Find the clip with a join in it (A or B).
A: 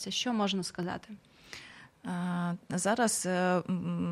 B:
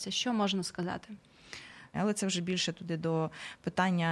B